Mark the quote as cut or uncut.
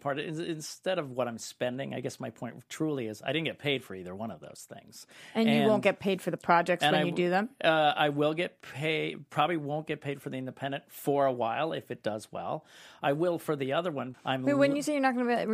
cut